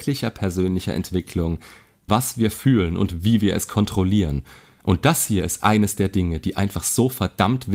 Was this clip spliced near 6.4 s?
no; 1 cut; at 2.1 s

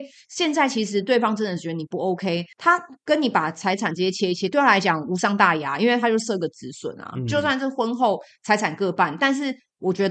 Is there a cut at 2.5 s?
yes; 1 cut; at 2.5 s

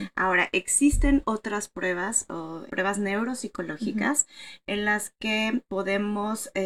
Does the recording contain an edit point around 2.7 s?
yes; 1 cut; at 2.7 s

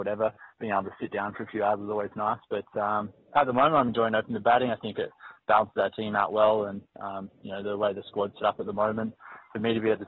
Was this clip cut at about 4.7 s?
no; 0 cuts

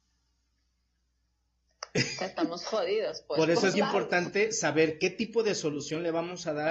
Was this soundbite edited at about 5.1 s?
no; 1 cut; at 3.7 s

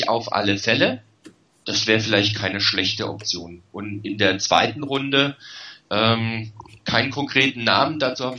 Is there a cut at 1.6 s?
yes; 1 cut; at 1.6 s

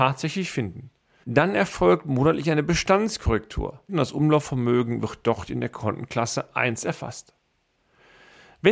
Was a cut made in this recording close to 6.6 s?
no; 2 cuts; at 1.2 s, 3.9 s

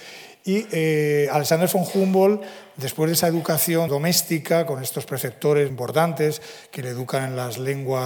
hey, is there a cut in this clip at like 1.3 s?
no; 2 cuts; at 3.9 s, 5.7 s

